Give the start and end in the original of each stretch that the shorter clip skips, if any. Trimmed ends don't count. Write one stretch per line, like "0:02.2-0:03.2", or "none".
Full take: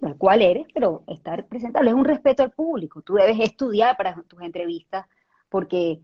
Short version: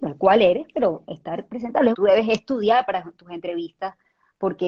0:01.9-0:03.0